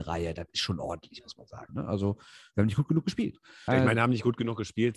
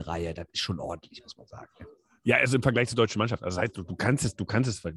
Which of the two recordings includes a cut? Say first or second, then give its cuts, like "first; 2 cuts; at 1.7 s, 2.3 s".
first; 2 cuts; at 1.7 s, 3.7 s